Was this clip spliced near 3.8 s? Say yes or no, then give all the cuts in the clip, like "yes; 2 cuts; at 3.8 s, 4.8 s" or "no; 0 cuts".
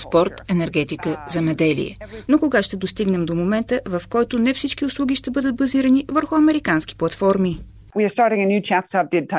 no; 1 cut; at 2.3 s